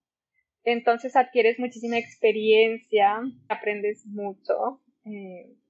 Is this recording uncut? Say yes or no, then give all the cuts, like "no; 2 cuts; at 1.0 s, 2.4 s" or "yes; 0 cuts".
no; 1 cut; at 3.5 s